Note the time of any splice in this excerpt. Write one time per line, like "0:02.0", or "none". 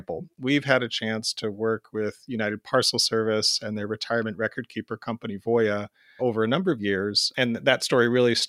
0:06.2